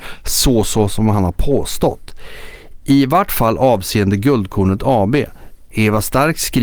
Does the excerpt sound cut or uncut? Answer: cut